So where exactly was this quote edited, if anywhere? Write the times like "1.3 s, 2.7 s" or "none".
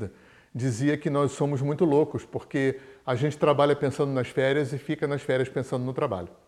none